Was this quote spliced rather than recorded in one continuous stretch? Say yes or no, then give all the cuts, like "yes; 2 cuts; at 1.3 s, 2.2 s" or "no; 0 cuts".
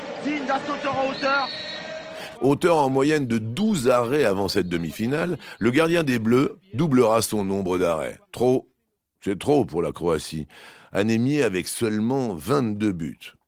yes; 2 cuts; at 2.3 s, 8.2 s